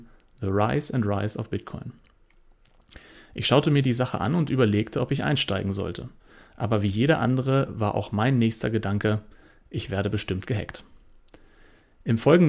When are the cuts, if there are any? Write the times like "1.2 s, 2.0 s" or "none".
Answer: none